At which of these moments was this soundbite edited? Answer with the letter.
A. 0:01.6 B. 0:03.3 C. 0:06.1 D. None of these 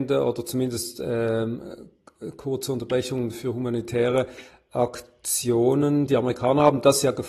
D